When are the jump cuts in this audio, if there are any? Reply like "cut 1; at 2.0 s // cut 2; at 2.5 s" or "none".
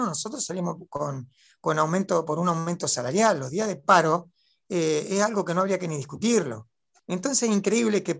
cut 1; at 7.0 s